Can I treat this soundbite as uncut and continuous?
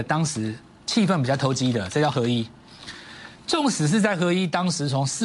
yes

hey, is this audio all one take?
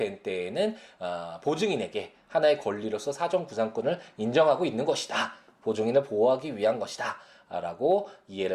yes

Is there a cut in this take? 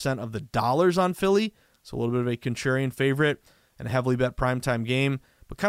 no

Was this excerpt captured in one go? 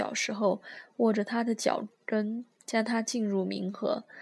yes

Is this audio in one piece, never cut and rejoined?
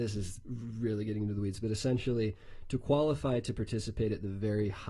yes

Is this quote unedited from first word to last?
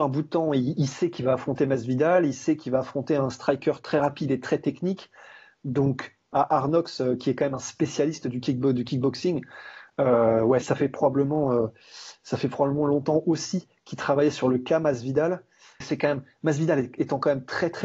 no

